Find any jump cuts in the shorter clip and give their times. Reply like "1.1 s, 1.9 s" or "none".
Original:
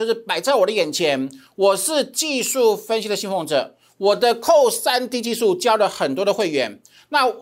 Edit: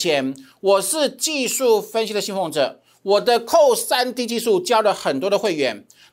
none